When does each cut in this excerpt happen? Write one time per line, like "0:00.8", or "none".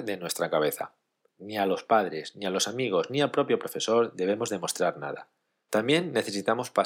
0:01.3